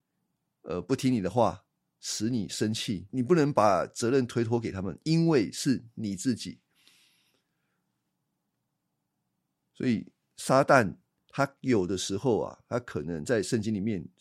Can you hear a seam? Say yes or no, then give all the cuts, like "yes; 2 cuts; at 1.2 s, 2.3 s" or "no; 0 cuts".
yes; 1 cut; at 3.1 s